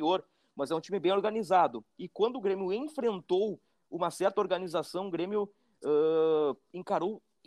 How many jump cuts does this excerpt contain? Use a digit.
0